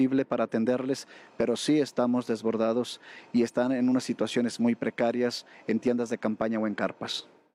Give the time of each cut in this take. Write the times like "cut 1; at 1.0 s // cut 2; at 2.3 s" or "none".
none